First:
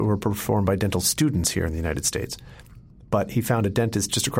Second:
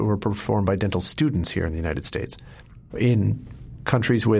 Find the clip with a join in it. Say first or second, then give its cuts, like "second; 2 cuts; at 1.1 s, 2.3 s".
second; 1 cut; at 2.9 s